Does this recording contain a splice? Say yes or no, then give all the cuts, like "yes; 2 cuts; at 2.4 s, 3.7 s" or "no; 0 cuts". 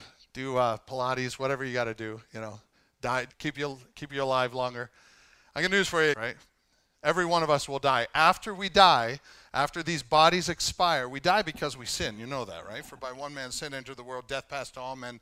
yes; 2 cuts; at 3.3 s, 6.1 s